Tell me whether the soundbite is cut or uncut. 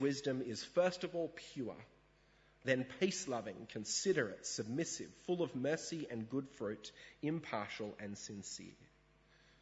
uncut